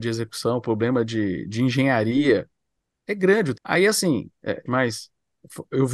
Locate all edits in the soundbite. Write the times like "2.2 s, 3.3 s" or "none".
3.5 s, 4.7 s